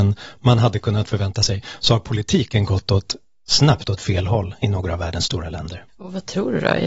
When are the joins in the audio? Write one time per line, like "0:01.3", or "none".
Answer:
0:05.9